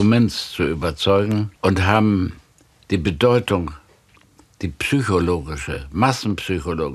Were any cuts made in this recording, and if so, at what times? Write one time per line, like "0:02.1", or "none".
0:01.6